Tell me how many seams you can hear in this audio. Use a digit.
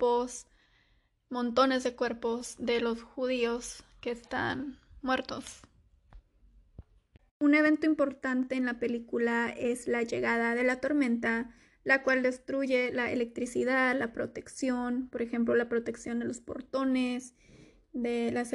1